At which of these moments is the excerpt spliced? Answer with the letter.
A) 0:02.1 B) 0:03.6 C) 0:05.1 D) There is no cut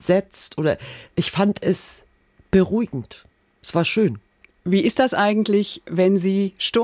D